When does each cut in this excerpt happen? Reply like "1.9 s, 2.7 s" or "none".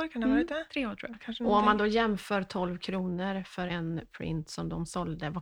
3.7 s